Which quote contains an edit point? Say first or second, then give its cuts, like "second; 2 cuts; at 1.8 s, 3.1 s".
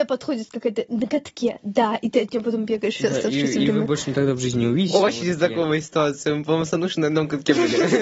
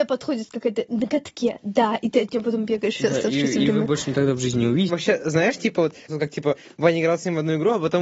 second; 2 cuts; at 4.9 s, 6.1 s